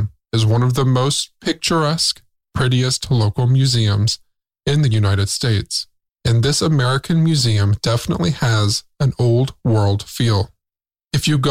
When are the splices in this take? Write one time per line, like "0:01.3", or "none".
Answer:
0:06.1